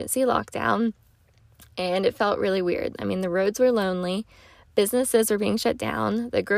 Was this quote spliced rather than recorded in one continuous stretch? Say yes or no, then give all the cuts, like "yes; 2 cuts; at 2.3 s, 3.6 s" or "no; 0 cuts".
no; 0 cuts